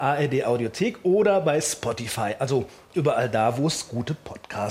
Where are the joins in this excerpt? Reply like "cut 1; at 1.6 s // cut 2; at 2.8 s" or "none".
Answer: cut 1; at 2.9 s